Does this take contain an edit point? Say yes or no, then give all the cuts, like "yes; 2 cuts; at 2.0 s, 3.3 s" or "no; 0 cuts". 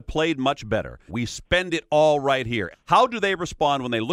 yes; 2 cuts; at 1.1 s, 2.7 s